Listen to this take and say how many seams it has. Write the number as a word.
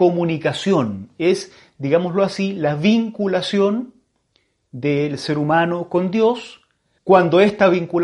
one